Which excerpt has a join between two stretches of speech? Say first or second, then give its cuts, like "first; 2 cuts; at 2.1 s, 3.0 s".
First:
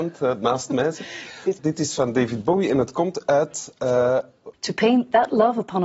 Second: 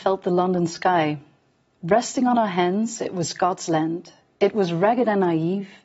first; 2 cuts; at 1.6 s, 4.5 s